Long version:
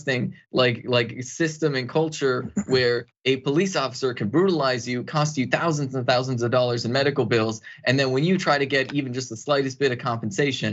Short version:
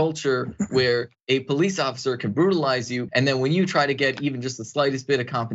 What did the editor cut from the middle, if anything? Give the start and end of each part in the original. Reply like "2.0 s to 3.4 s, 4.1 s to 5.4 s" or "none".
5.1 s to 7.8 s